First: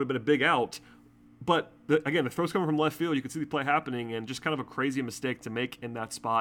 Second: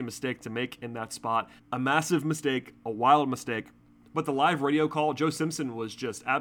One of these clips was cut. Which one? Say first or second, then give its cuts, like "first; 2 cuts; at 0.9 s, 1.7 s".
second; 2 cuts; at 1.6 s, 4.0 s